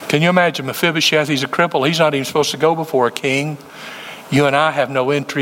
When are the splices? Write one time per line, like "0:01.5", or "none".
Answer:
none